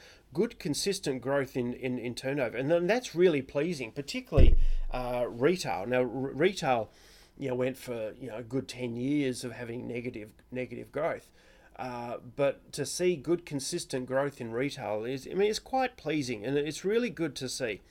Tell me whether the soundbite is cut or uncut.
uncut